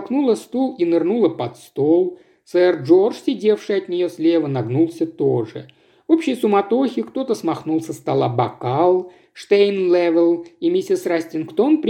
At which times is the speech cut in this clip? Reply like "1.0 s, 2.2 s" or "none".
none